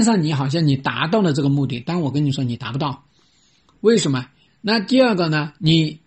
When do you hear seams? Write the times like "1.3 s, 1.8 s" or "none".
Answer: 4.5 s